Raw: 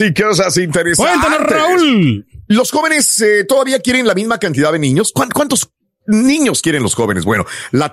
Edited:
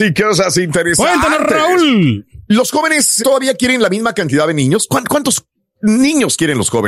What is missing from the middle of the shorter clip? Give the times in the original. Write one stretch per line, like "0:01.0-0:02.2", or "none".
0:03.2-0:03.4